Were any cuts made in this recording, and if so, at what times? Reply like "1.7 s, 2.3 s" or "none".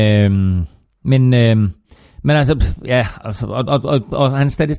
none